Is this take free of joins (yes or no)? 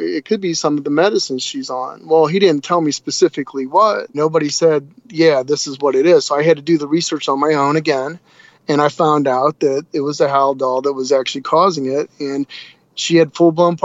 no